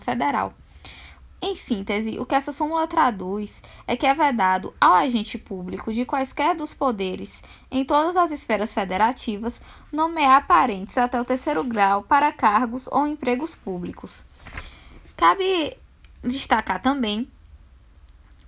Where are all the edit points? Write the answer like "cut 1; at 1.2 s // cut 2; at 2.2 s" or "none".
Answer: none